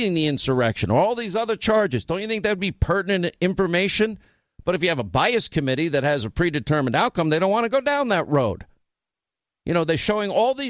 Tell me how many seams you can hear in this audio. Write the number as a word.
zero